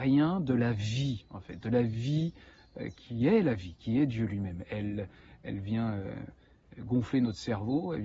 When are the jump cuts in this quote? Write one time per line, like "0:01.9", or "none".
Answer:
none